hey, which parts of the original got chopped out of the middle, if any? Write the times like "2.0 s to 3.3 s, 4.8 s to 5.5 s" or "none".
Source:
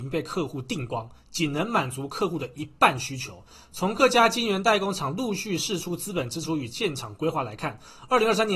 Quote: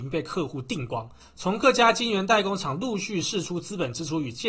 1.2 s to 3.6 s